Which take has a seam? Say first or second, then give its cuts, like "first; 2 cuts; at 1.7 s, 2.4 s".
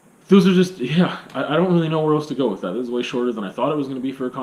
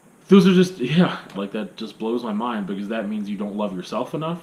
second; 1 cut; at 1.3 s